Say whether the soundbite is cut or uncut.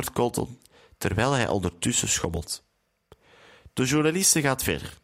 uncut